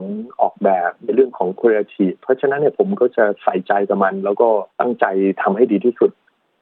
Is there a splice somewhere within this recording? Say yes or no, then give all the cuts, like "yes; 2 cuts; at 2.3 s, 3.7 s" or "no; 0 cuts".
yes; 1 cut; at 4.7 s